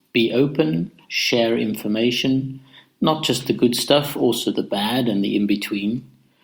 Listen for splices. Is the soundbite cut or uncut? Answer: uncut